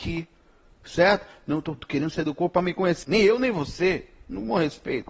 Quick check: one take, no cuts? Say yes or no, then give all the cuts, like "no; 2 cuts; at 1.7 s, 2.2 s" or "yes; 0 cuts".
no; 1 cut; at 3.0 s